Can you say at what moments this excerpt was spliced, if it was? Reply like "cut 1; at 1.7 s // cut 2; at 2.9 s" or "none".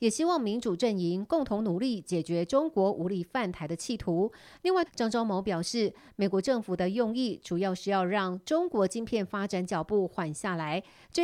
cut 1; at 4.9 s

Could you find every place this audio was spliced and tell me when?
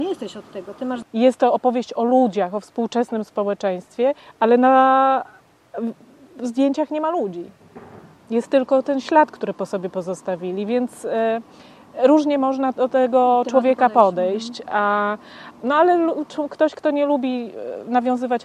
cut 1; at 1.0 s

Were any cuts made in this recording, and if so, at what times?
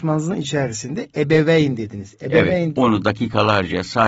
cut 1; at 2.7 s

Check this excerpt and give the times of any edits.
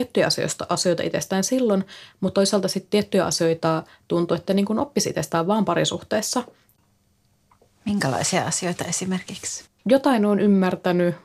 cut 1; at 9.6 s

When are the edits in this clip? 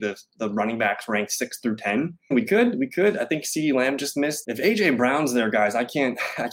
cut 1; at 2.3 s // cut 2; at 4.4 s

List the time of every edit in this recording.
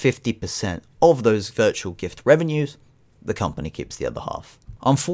none

